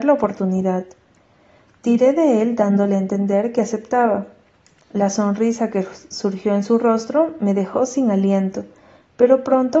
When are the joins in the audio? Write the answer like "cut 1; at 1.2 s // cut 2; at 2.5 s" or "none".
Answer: none